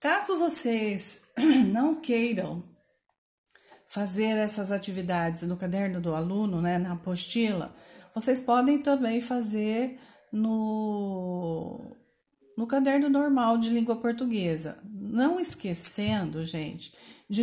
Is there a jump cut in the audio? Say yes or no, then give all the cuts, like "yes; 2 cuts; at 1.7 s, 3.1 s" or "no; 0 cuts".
no; 0 cuts